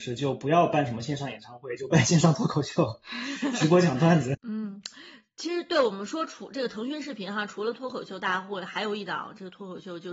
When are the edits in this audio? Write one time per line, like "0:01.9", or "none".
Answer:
0:04.3